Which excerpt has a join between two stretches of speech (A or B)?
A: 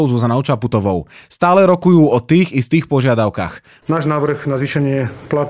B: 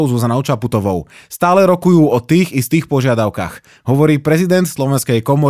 A